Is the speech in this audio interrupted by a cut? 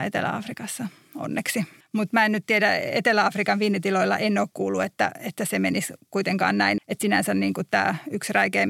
yes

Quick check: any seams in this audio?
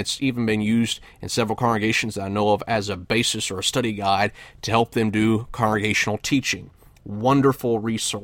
no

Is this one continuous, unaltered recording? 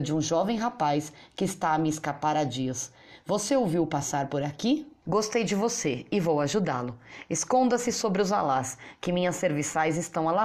no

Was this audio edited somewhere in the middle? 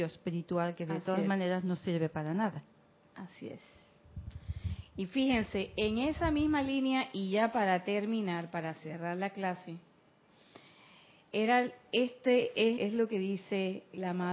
yes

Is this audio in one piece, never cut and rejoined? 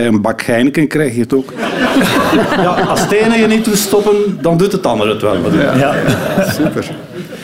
yes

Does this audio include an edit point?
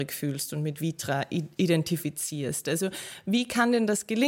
no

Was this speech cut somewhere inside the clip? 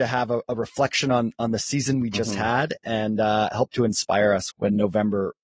yes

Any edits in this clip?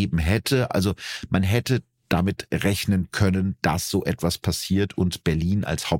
no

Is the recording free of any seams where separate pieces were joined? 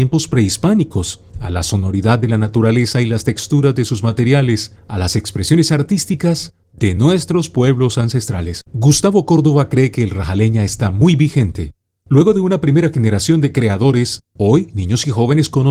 no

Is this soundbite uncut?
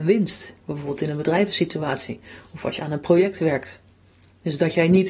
yes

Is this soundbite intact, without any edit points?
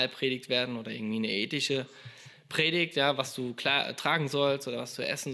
yes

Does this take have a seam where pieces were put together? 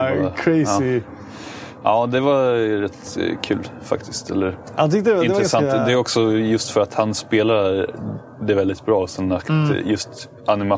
no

